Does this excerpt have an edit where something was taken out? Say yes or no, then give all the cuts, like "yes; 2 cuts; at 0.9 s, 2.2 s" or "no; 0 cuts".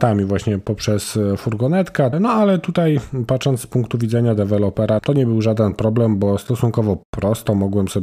yes; 2 cuts; at 2.1 s, 5.0 s